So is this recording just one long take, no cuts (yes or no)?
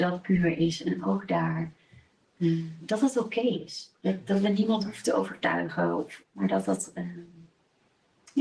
no